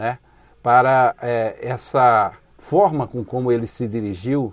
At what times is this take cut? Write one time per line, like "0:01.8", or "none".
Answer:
0:03.3